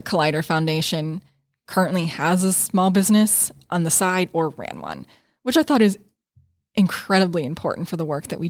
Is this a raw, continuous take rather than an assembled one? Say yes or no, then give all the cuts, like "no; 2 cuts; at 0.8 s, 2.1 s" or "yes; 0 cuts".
yes; 0 cuts